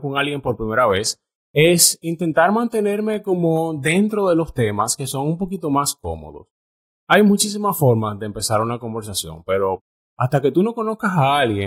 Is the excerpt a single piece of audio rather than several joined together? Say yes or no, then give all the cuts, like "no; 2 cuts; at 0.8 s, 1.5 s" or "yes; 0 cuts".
yes; 0 cuts